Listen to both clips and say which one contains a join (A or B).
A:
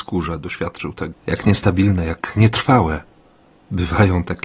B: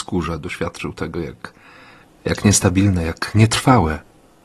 A